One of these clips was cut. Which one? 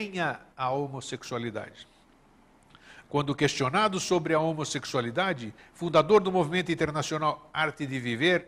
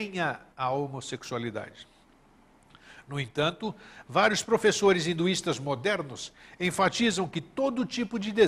first; 2 cuts; at 3.0 s, 5.6 s

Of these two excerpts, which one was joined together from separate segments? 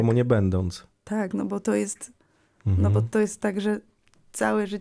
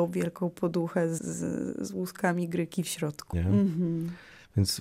second; 2 cuts; at 1.2 s, 3.3 s

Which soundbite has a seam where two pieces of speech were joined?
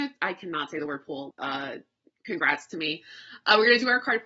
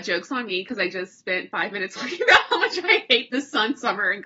first; 1 cut; at 1.3 s

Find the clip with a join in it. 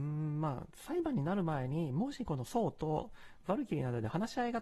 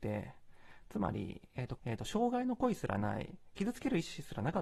second; 1 cut; at 1.8 s

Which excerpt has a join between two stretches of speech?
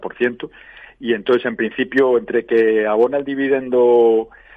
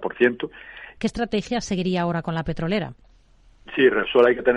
second; 1 cut; at 1.0 s

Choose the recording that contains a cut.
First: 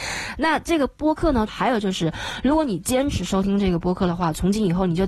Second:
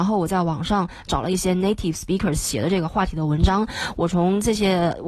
first; 1 cut; at 1.5 s

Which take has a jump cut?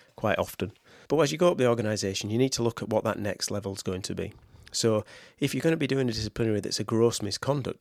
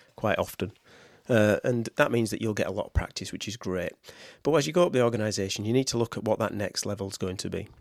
first; 1 cut; at 1.0 s

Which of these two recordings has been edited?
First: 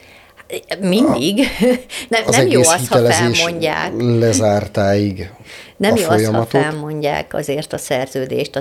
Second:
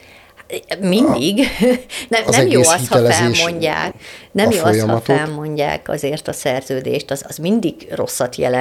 second; 1 cut; at 3.9 s

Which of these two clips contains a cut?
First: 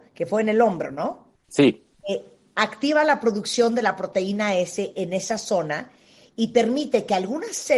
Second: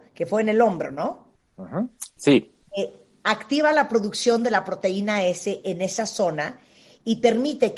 first; 1 cut; at 1.4 s

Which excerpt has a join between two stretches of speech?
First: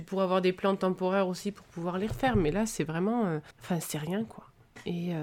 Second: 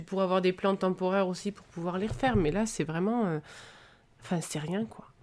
first; 1 cut; at 3.5 s

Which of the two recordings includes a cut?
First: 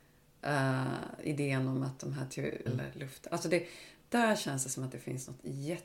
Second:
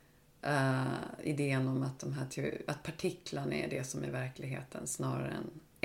first; 1 cut; at 2.7 s

